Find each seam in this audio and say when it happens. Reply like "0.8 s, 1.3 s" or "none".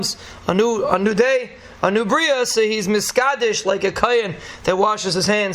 none